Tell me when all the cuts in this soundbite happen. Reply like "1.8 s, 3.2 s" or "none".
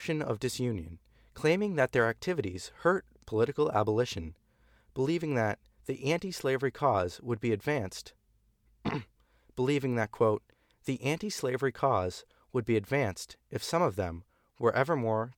none